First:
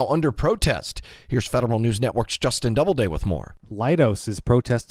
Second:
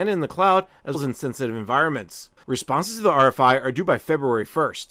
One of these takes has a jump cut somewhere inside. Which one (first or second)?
second